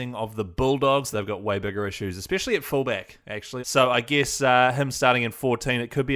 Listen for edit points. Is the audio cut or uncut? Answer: cut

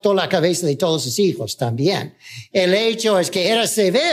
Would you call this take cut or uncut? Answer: uncut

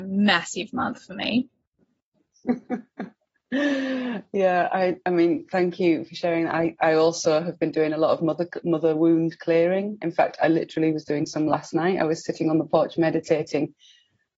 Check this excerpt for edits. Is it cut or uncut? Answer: cut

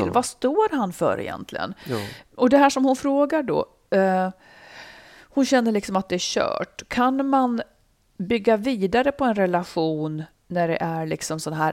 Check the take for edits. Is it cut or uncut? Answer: uncut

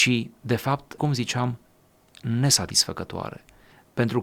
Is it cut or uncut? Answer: cut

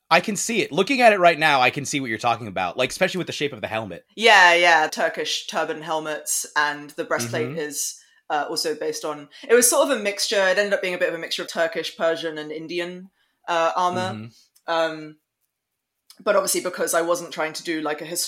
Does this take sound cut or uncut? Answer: cut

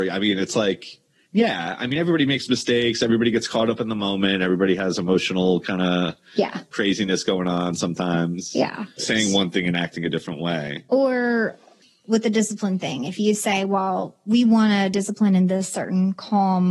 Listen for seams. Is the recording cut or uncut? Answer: cut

